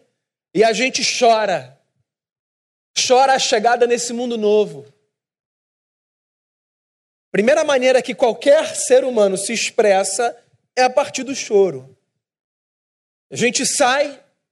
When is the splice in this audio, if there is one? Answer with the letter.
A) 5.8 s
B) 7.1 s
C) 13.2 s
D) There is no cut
B